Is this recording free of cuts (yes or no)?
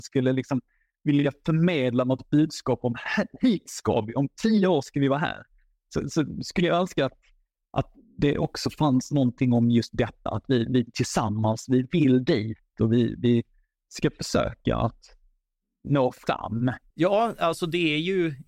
yes